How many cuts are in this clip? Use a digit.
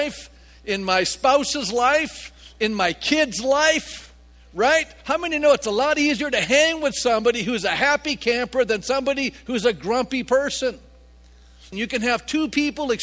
1